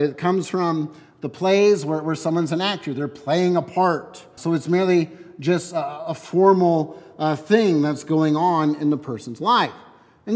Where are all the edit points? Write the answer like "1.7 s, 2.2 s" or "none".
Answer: 4.4 s